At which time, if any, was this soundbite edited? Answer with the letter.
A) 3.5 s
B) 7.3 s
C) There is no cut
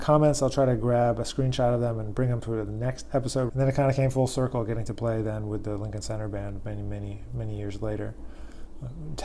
A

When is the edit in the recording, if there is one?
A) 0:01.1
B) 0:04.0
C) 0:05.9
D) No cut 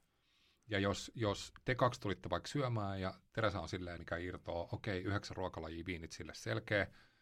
B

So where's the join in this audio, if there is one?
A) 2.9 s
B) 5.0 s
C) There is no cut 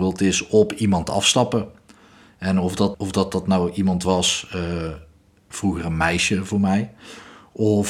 A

